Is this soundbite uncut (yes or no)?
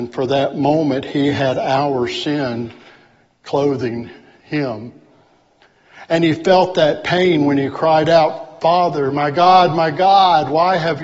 yes